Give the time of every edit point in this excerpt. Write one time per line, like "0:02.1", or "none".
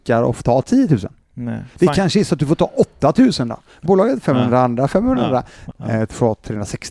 0:03.8
0:05.7